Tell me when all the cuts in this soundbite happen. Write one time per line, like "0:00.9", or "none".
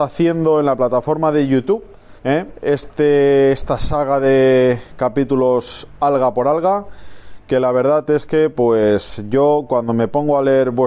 0:02.2